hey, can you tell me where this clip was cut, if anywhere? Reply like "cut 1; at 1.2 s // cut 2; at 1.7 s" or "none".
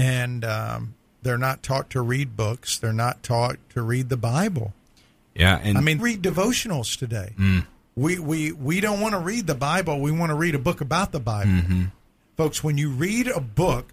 cut 1; at 6.0 s